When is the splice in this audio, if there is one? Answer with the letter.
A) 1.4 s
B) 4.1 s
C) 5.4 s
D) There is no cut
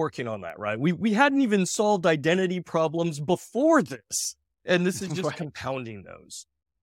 D